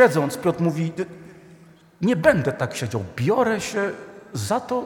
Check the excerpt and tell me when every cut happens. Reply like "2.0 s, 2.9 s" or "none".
none